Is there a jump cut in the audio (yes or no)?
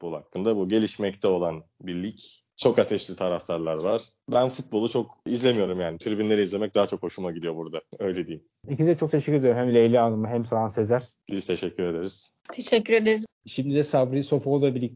yes